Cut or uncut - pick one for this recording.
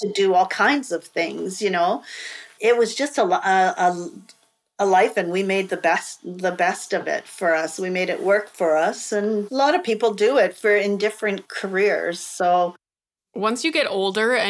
uncut